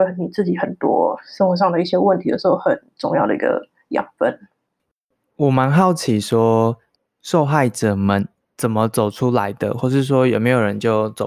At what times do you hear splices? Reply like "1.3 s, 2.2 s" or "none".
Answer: none